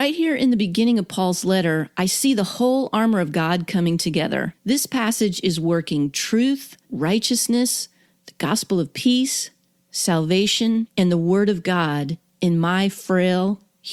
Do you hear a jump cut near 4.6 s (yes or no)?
no